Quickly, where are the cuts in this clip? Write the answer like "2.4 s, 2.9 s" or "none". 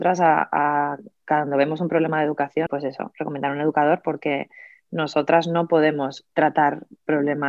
2.7 s